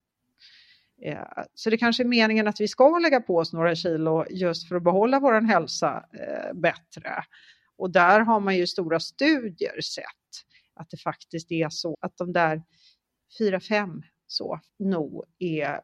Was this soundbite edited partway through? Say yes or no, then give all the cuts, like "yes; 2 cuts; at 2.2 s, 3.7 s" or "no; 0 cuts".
yes; 2 cuts; at 11.9 s, 14.7 s